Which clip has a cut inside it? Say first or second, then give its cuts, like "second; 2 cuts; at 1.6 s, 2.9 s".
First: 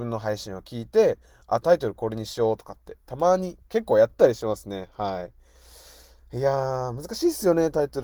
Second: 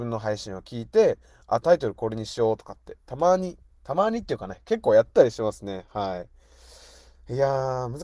first; 1 cut; at 3.7 s